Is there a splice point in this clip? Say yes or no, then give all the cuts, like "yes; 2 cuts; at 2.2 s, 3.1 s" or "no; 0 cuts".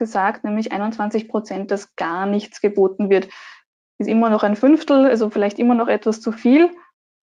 no; 0 cuts